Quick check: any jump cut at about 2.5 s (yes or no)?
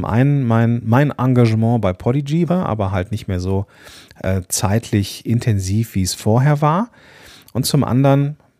yes